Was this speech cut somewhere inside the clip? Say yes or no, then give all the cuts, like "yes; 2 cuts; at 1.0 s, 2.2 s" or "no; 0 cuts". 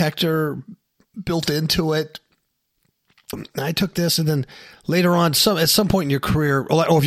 yes; 1 cut; at 3.3 s